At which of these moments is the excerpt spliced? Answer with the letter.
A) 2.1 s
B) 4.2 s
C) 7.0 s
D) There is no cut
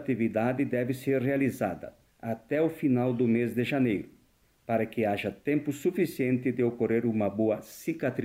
A